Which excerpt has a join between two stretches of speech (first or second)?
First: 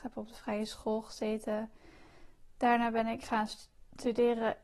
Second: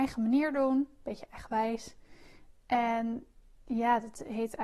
second